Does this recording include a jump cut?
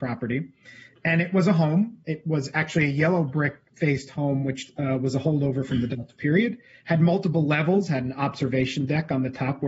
no; 0 cuts

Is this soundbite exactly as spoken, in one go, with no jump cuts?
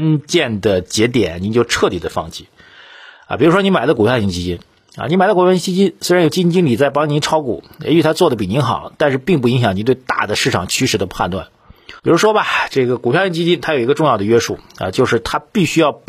no; 1 cut; at 12.0 s

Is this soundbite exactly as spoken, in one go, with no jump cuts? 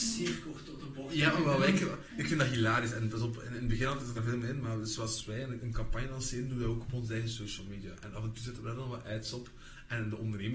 no; 1 cut; at 4.2 s

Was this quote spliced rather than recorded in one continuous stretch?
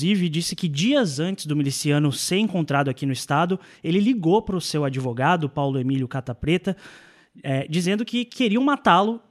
no; 0 cuts

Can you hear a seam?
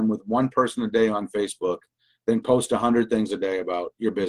no; 0 cuts

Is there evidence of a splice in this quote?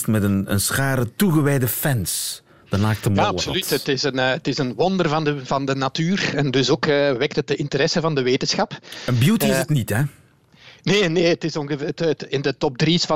no; 0 cuts

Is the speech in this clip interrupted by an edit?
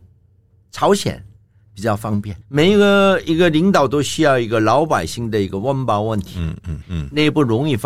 yes; 2 cuts; at 2.4 s, 6.8 s

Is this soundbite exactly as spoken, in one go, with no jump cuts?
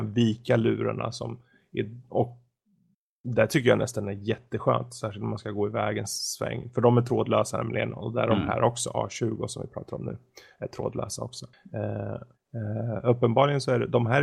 no; 1 cut; at 12.3 s

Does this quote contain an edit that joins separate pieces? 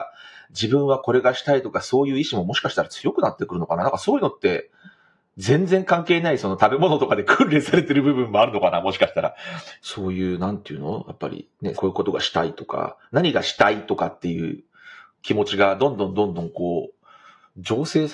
yes; 2 cuts; at 9.8 s, 11.7 s

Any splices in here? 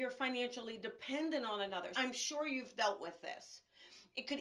yes; 1 cut; at 1.9 s

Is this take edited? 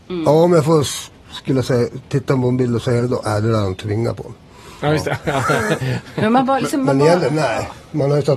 yes; 1 cut; at 1.2 s

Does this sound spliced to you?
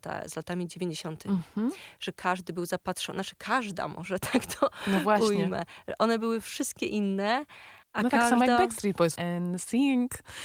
yes; 2 cuts; at 7.8 s, 9.2 s

